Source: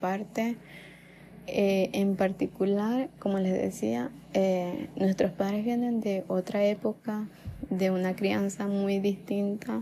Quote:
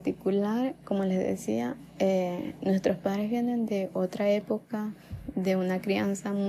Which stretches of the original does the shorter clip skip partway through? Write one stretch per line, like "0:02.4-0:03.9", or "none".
none